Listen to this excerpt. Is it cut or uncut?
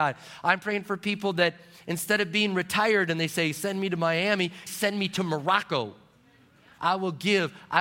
cut